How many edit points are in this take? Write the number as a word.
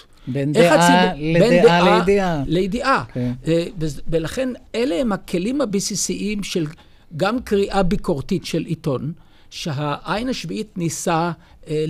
zero